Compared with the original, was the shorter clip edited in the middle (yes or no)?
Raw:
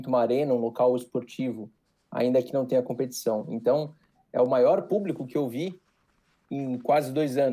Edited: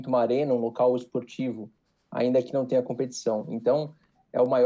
no